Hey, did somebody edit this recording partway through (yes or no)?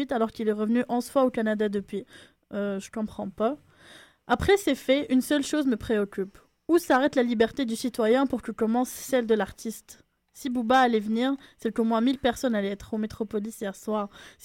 no